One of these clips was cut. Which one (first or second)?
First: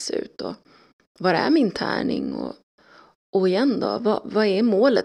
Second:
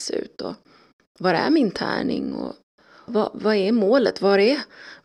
second